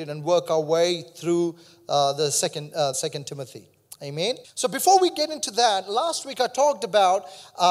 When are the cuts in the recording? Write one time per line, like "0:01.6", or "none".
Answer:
0:02.9
0:04.4